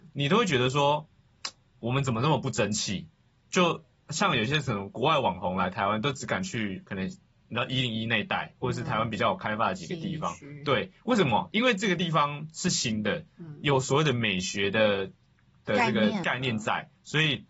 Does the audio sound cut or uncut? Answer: uncut